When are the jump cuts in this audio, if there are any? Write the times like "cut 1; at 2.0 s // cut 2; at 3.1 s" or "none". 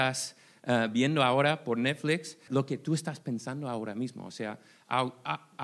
cut 1; at 2.5 s